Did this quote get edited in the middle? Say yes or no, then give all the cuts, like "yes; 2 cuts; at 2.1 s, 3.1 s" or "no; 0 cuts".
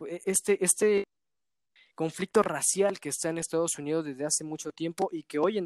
no; 0 cuts